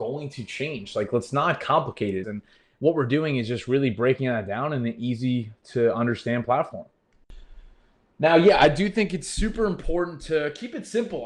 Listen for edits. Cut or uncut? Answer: cut